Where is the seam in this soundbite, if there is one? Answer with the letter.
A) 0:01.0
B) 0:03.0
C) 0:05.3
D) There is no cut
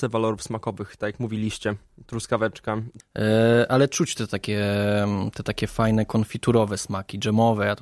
B